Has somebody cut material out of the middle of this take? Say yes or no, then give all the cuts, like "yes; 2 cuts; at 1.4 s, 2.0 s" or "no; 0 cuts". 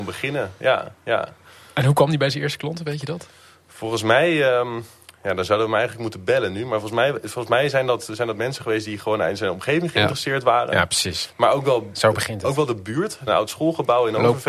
yes; 1 cut; at 13.3 s